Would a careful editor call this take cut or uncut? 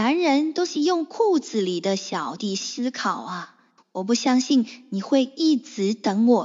cut